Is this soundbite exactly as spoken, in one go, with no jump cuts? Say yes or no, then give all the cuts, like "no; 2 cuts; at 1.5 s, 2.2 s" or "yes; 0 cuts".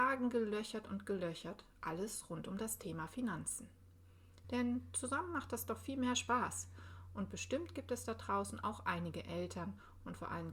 no; 1 cut; at 4.4 s